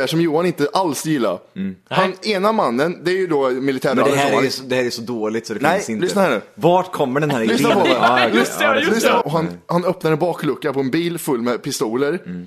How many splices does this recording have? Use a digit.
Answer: 2